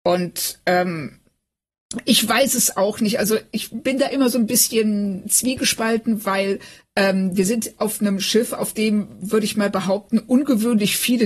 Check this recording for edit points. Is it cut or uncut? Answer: uncut